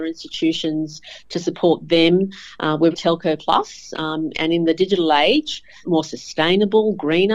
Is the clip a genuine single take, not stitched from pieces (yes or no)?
no